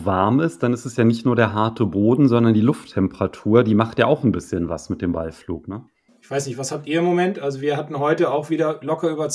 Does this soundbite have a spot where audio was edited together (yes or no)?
yes